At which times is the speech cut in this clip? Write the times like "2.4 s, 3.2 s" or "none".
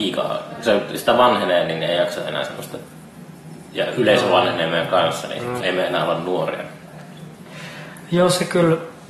5.6 s